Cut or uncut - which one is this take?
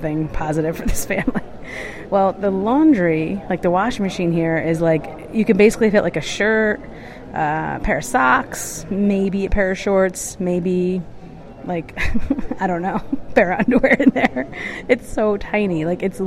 uncut